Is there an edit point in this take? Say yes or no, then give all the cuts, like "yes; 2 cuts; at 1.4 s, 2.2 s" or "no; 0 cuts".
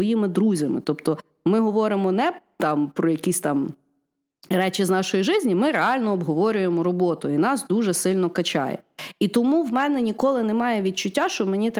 no; 0 cuts